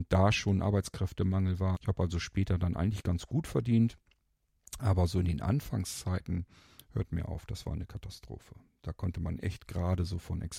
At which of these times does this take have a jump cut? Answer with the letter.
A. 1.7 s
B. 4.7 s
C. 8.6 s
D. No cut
A